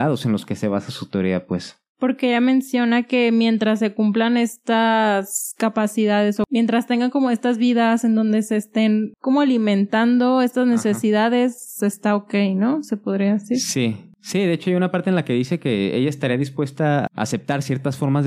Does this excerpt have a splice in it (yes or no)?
no